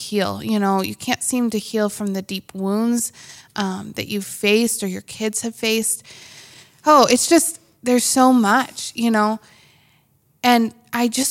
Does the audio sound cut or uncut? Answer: uncut